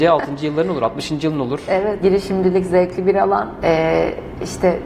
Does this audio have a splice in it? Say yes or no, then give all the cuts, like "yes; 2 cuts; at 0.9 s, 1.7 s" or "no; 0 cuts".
yes; 2 cuts; at 2.0 s, 3.6 s